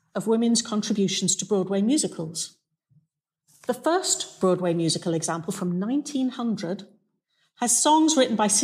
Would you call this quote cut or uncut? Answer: uncut